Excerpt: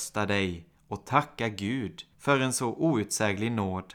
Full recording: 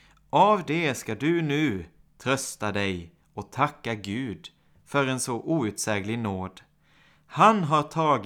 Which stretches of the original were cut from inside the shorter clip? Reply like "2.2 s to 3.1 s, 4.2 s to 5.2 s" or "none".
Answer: 4.6 s to 4.8 s